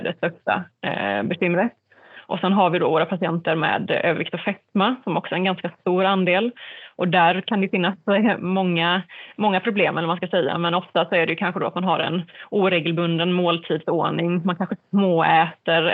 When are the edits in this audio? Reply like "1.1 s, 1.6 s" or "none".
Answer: none